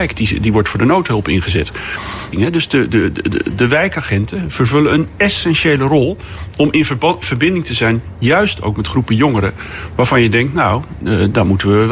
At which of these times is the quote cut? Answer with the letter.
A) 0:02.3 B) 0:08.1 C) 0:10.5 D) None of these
A